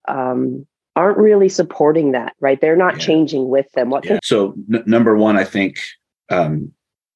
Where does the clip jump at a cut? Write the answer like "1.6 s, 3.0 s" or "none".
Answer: 4.2 s